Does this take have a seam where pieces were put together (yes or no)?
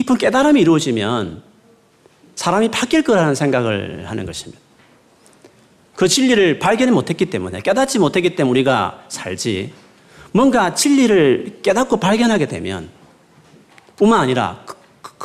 no